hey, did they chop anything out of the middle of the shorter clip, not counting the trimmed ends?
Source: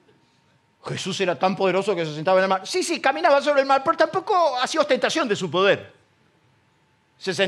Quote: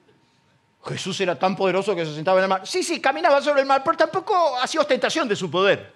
no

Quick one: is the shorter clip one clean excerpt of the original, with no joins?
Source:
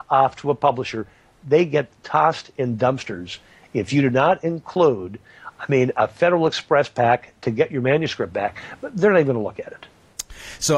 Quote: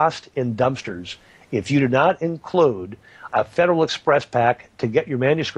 no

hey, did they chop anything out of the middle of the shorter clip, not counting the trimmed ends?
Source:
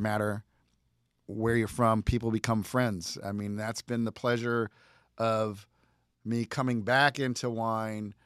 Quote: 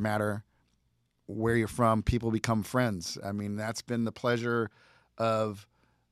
no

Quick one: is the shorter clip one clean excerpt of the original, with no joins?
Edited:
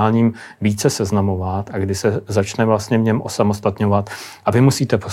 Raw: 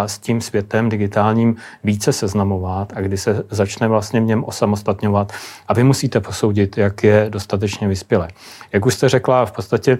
yes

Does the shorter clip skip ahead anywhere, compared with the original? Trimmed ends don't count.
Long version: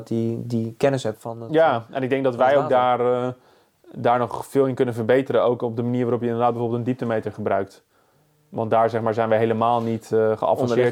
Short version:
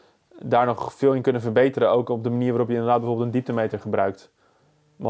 no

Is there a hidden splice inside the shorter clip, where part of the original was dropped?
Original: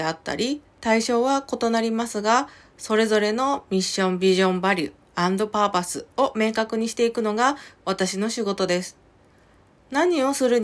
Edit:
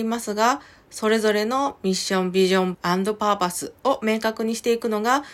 yes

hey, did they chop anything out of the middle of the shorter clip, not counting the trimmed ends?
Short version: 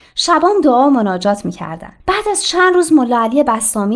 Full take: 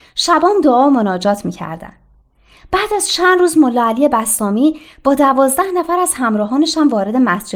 yes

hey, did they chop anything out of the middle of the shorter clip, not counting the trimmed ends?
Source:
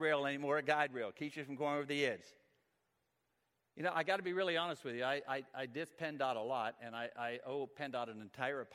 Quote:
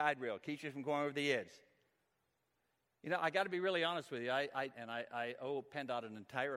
yes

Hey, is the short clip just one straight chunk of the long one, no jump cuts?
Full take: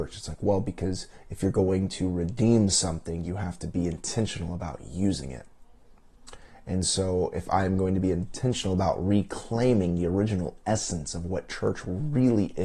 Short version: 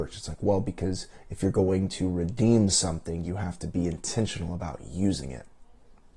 yes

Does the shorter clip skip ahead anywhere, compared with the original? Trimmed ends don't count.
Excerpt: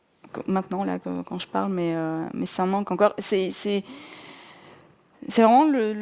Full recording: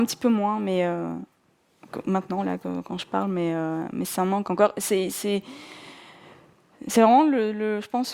no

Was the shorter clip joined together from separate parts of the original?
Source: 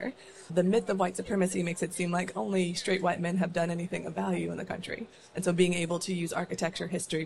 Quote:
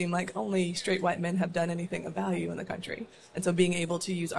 no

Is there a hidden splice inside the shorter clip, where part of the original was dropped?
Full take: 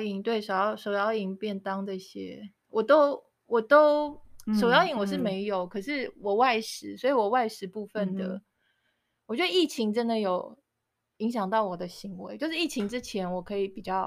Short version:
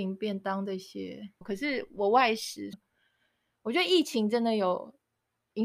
yes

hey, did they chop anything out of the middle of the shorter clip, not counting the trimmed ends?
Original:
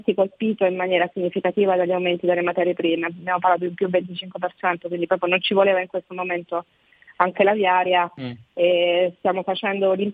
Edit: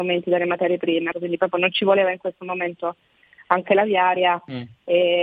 yes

